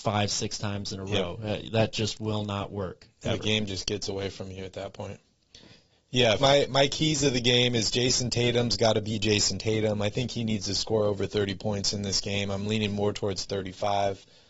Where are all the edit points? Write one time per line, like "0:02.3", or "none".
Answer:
0:06.4